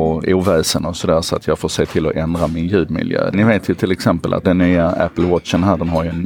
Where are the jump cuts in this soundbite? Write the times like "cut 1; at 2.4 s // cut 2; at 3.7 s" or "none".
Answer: cut 1; at 3.3 s // cut 2; at 4.4 s